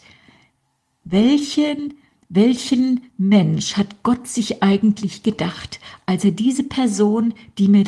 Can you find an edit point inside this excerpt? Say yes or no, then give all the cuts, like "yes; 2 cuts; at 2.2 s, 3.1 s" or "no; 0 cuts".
no; 0 cuts